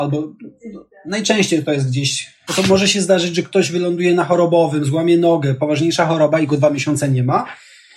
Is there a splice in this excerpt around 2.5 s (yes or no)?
yes